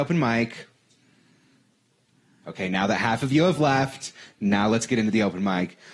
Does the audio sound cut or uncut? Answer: uncut